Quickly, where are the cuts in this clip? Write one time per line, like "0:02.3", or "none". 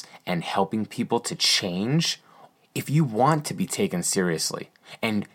0:02.5